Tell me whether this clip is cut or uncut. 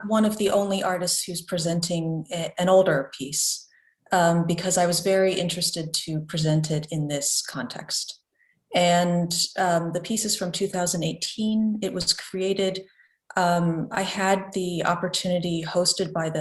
uncut